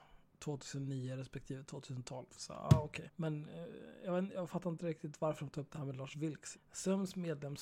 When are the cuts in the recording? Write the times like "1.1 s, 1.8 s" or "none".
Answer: 3.1 s, 6.5 s